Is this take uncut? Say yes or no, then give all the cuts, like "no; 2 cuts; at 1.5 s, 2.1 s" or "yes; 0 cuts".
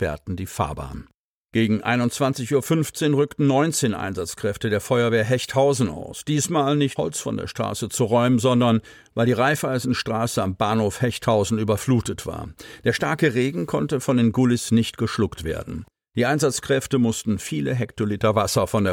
no; 1 cut; at 7.0 s